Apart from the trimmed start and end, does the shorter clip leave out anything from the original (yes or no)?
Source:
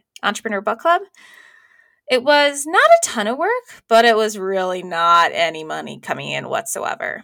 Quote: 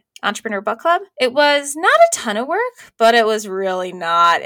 yes